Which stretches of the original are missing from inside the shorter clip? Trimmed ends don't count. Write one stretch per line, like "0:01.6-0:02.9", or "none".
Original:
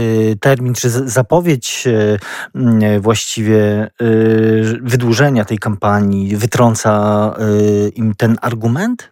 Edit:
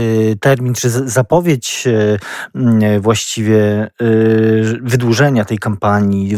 none